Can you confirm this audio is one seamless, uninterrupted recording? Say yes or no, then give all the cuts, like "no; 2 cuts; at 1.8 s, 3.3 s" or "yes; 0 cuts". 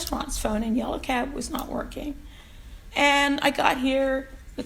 no; 1 cut; at 2.9 s